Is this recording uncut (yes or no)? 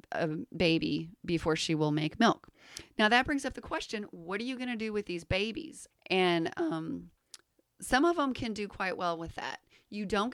no